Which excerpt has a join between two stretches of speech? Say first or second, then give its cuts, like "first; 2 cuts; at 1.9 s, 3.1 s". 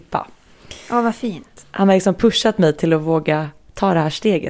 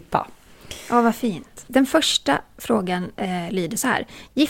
second; 2 cuts; at 1.7 s, 3.1 s